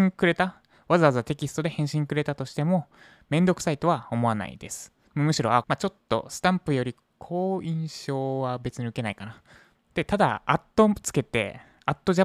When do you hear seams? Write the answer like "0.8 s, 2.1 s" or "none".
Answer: 5.6 s, 9.8 s